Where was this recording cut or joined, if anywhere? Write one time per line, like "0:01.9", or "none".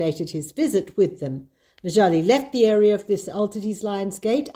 none